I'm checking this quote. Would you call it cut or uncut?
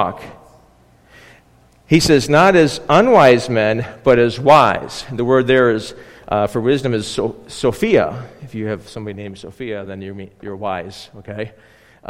uncut